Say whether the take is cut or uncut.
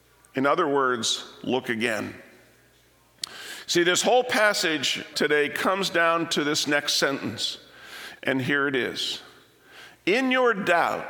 cut